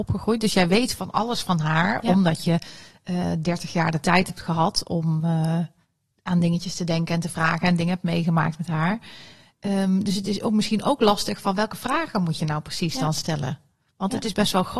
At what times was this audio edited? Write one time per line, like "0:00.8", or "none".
none